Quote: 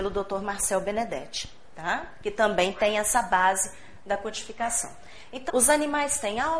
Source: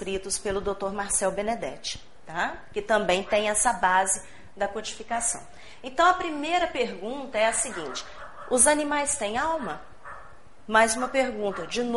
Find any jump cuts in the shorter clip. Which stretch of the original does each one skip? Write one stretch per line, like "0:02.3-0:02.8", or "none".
0:06.0-0:08.4